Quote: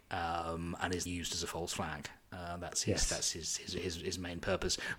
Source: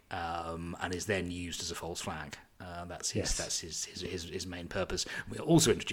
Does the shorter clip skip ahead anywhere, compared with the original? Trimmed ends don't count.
yes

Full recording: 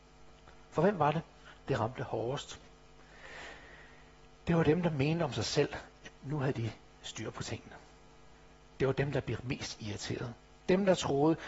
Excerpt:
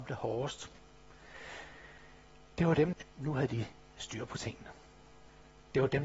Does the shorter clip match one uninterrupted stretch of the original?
no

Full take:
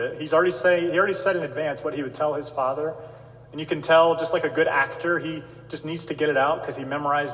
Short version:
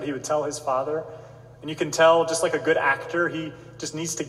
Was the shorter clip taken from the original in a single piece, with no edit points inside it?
yes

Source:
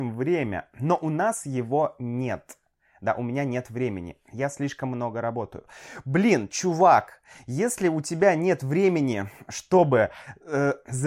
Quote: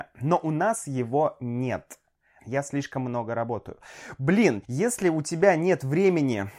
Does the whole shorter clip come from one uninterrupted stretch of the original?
no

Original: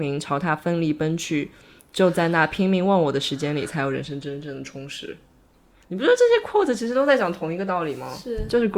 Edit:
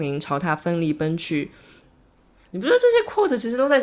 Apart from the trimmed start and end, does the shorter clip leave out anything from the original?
yes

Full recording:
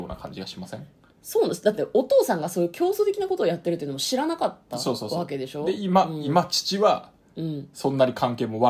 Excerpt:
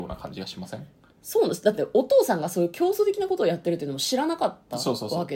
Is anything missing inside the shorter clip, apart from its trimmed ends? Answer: no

